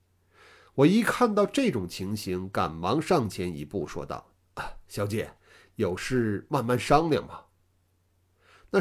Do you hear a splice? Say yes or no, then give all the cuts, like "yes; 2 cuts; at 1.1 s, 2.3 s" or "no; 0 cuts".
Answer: no; 0 cuts